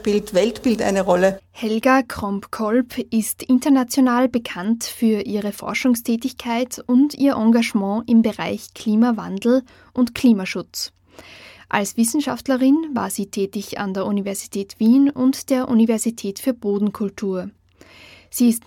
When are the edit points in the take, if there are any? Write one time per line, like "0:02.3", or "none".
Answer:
none